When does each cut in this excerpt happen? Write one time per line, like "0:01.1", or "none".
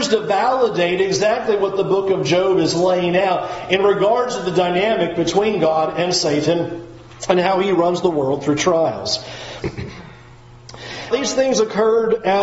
0:09.6
0:11.1